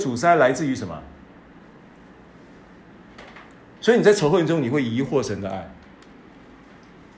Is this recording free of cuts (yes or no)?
no